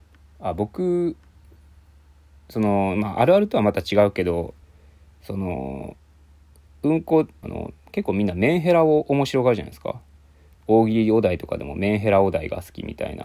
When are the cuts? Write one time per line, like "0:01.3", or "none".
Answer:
0:07.4